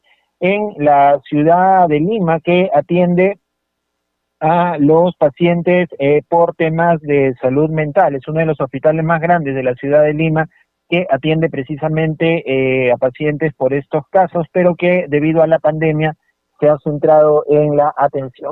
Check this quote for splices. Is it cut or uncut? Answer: uncut